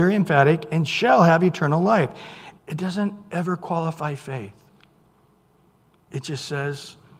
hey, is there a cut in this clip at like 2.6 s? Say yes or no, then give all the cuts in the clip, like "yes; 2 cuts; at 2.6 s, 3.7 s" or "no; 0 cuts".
yes; 1 cut; at 2.6 s